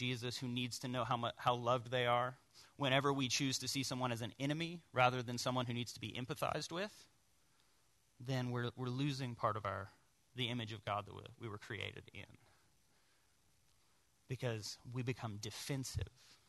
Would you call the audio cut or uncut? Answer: uncut